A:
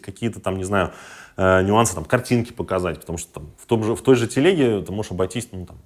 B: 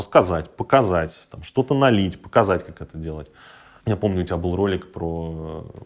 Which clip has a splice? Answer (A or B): B